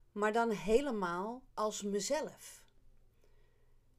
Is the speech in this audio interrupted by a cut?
yes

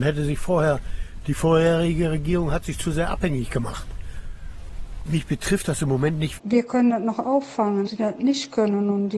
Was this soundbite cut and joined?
yes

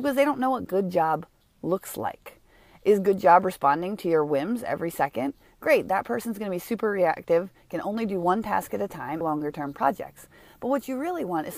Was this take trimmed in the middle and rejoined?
yes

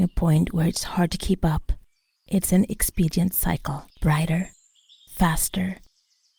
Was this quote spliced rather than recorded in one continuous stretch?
yes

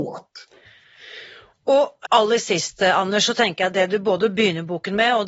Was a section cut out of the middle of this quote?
yes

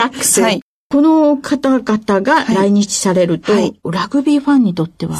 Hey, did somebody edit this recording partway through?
no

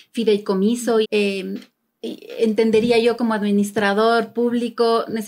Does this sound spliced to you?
yes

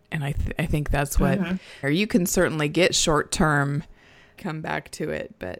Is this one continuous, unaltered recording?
no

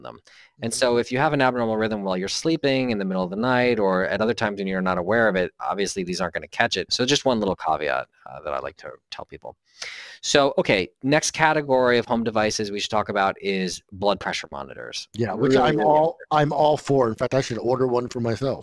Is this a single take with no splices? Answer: no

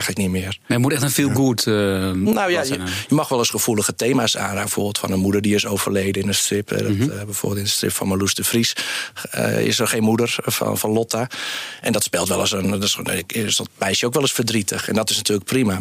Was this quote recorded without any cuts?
yes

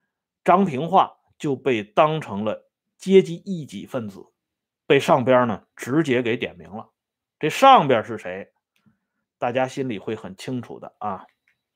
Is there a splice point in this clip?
no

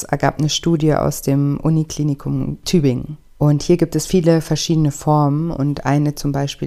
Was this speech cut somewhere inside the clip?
yes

